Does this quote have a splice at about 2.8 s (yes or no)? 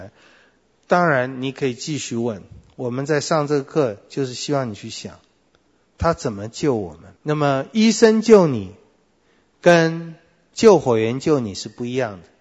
no